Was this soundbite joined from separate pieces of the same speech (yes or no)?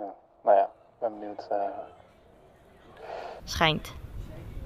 yes